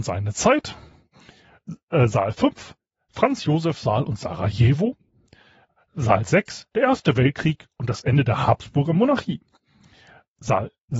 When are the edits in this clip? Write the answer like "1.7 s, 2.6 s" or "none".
none